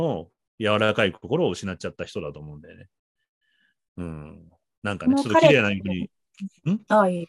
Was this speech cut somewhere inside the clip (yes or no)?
no